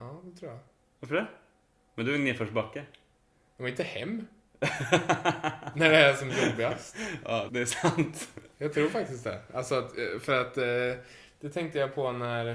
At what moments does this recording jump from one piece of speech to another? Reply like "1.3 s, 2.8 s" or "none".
7.5 s